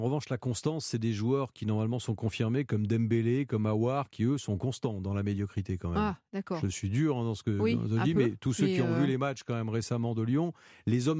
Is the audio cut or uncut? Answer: uncut